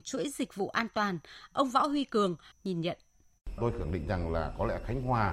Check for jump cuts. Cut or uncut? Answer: cut